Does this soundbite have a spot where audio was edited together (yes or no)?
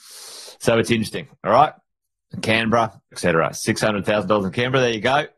yes